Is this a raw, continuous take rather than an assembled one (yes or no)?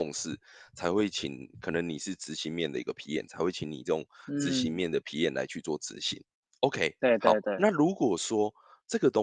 yes